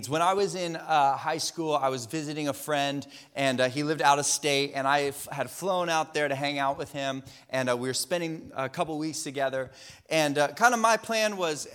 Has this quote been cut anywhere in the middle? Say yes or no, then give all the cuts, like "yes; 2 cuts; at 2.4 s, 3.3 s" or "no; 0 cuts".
no; 0 cuts